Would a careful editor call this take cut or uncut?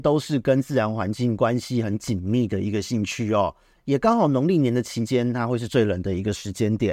cut